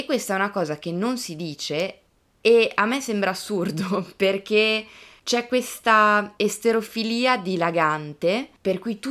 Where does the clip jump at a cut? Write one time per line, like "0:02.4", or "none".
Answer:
none